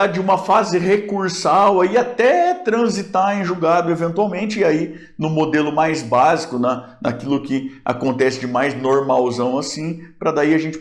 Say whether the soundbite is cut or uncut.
uncut